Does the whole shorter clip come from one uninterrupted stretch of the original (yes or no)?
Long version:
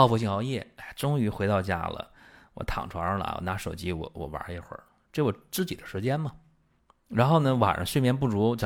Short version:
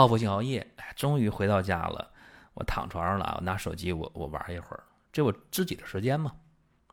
yes